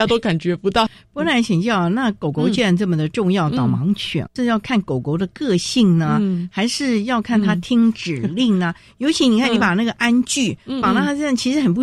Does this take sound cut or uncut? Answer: uncut